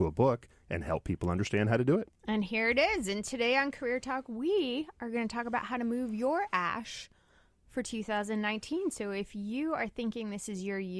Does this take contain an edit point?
no; 0 cuts

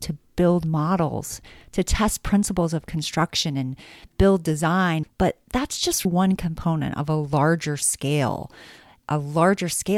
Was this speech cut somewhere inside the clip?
yes; 2 cuts; at 5.0 s, 6.0 s

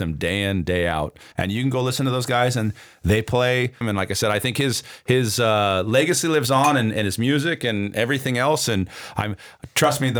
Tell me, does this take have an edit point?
yes; 2 cuts; at 1.3 s, 3.8 s

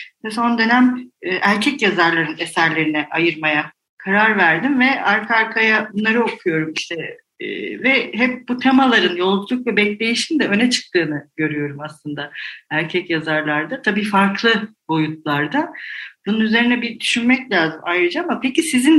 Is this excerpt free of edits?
yes; 0 cuts

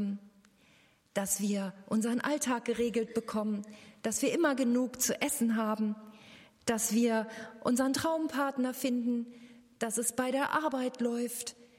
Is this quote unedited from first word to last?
yes; 0 cuts

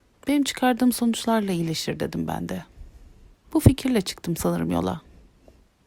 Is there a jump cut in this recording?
yes; 1 cut; at 3.3 s

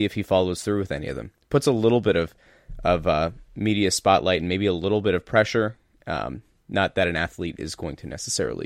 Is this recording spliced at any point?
no; 0 cuts

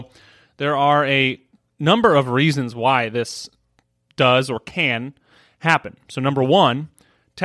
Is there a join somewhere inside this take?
no; 0 cuts

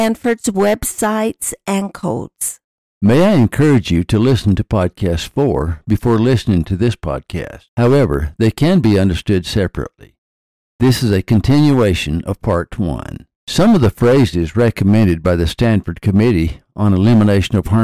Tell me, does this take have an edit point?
yes; 2 cuts; at 7.7 s, 13.4 s

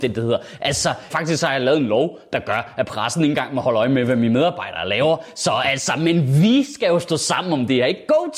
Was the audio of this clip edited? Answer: yes; 1 cut; at 1.1 s

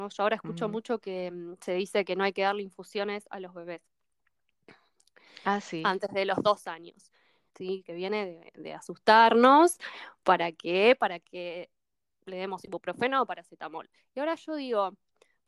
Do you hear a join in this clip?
yes; 1 cut; at 7.5 s

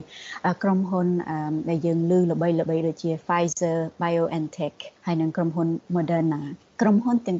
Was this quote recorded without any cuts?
no; 1 cut; at 5.0 s

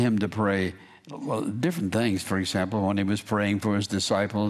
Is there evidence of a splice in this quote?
no; 0 cuts

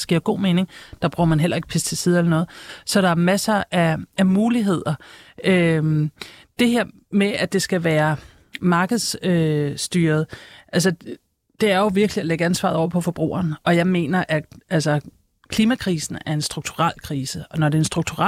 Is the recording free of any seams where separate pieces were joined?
yes; 0 cuts

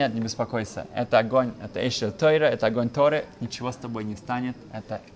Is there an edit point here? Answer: no; 0 cuts

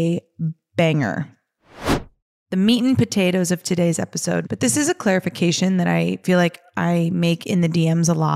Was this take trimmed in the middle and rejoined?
yes; 1 cut; at 4.4 s

